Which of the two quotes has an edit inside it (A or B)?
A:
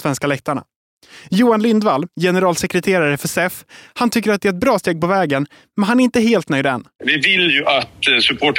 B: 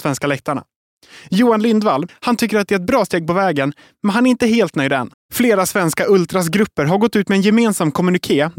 B